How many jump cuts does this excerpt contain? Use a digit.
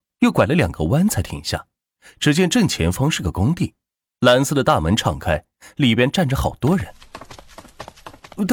0